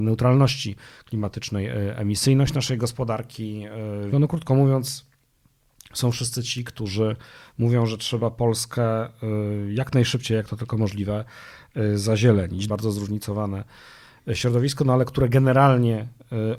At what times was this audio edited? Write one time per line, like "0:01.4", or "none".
0:04.1
0:12.7